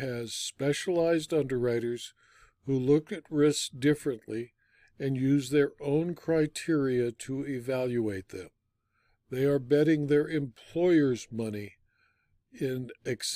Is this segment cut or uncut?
uncut